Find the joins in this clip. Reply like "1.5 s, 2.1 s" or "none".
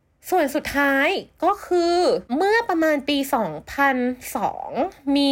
2.3 s